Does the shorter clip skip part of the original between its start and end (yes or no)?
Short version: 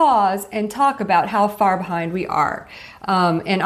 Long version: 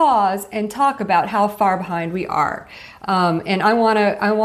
no